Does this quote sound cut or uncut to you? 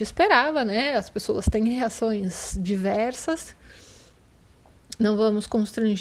uncut